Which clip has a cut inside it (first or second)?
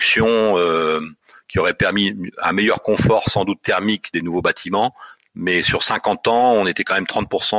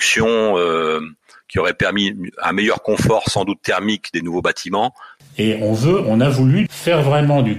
second